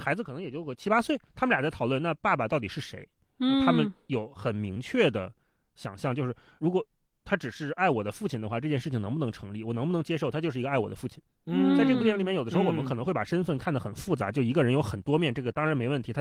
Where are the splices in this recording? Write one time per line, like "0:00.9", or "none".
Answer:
none